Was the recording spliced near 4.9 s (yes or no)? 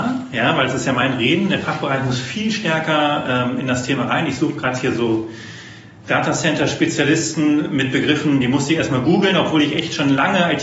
no